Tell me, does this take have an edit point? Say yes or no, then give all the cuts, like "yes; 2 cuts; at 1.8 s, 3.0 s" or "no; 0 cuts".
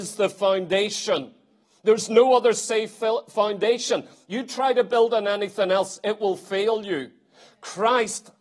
no; 0 cuts